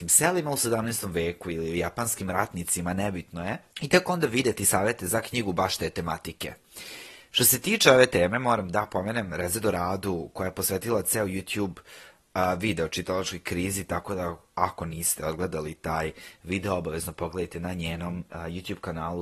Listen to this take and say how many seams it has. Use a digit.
1